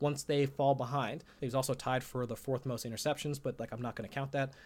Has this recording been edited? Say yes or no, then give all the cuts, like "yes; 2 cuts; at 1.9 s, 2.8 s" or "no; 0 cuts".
yes; 1 cut; at 1.4 s